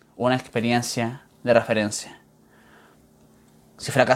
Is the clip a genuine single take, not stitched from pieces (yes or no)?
yes